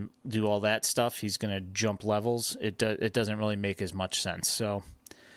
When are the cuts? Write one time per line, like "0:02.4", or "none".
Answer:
none